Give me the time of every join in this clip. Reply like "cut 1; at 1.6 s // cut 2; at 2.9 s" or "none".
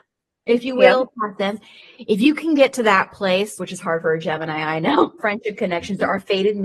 cut 1; at 3.6 s // cut 2; at 5.2 s